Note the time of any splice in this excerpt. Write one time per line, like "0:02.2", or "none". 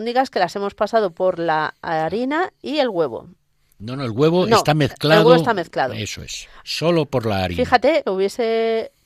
0:06.6
0:08.0